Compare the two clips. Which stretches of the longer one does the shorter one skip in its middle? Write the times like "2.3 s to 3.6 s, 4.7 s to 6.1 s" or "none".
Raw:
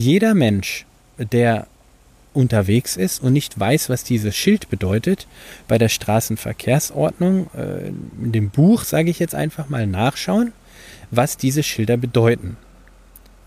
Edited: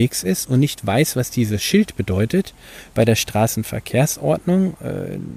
none